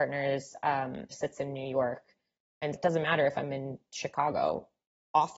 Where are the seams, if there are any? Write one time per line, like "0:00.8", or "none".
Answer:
0:01.1
0:02.7